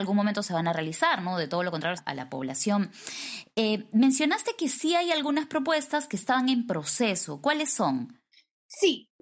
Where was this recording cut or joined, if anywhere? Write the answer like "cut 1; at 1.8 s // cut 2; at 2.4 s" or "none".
cut 1; at 2.0 s

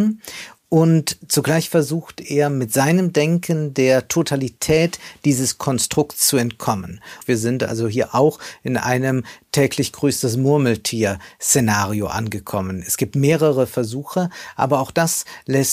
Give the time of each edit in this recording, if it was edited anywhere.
cut 1; at 7.2 s

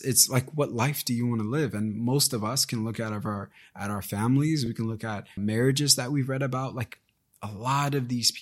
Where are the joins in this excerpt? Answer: none

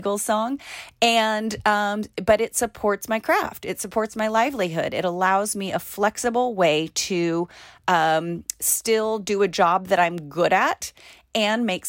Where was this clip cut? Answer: none

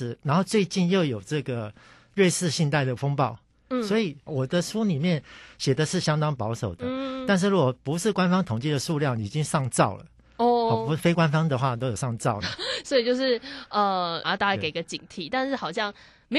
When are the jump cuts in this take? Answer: cut 1; at 4.3 s // cut 2; at 12.4 s // cut 3; at 14.2 s

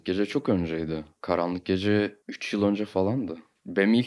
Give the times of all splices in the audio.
cut 1; at 2.2 s

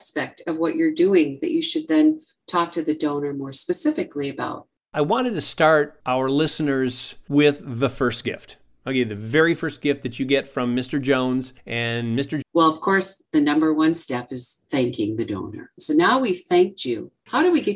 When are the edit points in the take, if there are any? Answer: cut 1; at 12.4 s // cut 2; at 15.8 s

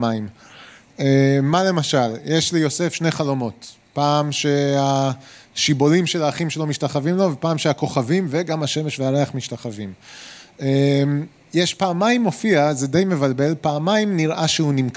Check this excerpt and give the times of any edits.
none

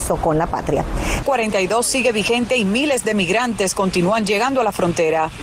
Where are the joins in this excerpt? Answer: cut 1; at 1.2 s

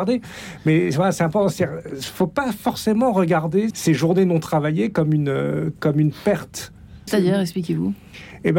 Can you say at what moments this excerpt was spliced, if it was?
cut 1; at 3.7 s // cut 2; at 7.1 s

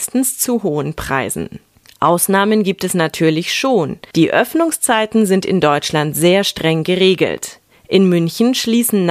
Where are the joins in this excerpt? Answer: cut 1; at 4.1 s

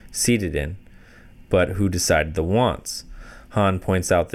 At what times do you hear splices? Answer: none

